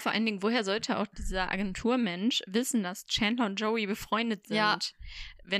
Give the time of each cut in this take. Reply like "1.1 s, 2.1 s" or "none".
none